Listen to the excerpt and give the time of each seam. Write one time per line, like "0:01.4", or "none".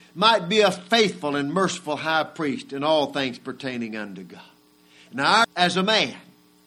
0:05.4